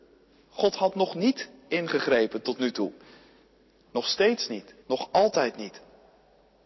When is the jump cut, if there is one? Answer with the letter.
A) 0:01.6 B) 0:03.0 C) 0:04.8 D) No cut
C